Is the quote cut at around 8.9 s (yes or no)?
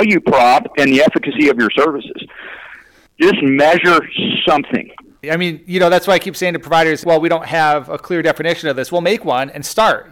no